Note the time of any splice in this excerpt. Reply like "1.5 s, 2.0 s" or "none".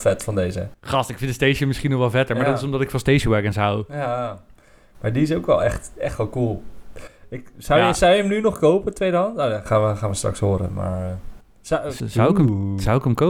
12.0 s